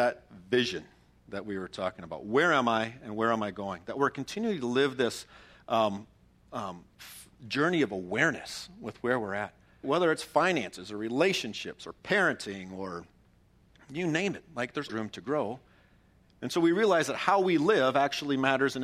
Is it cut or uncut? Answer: cut